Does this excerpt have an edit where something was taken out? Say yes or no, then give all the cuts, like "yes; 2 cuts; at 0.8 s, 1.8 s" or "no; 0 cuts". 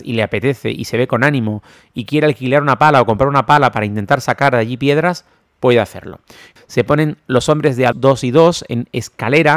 yes; 2 cuts; at 6.6 s, 7.9 s